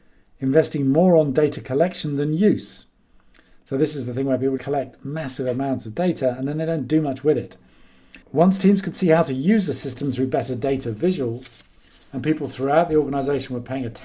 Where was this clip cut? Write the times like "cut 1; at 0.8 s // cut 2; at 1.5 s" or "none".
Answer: cut 1; at 4.6 s // cut 2; at 8.2 s